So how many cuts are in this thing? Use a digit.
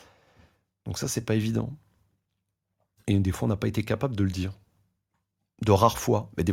0